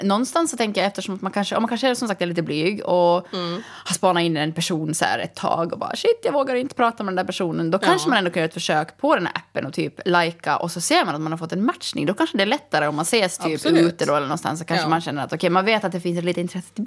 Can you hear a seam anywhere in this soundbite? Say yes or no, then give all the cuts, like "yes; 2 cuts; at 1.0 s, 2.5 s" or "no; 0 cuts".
no; 0 cuts